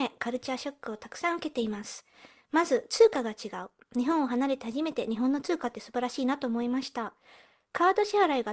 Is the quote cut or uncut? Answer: uncut